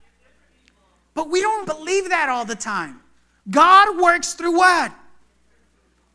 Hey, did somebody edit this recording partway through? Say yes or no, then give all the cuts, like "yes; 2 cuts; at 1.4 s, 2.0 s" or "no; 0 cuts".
yes; 2 cuts; at 1.6 s, 3.4 s